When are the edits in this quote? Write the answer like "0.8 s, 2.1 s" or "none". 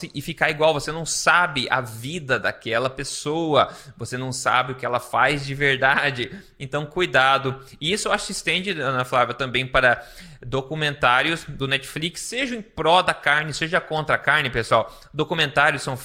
none